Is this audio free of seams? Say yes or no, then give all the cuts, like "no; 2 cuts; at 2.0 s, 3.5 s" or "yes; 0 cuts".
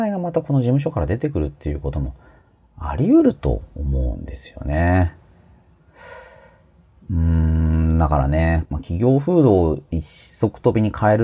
no; 1 cut; at 8.7 s